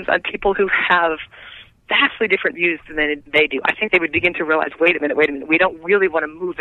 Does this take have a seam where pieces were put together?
no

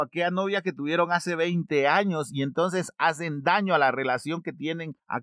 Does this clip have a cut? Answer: no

